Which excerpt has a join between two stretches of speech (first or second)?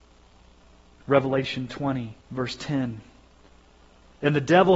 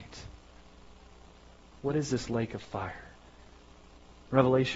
first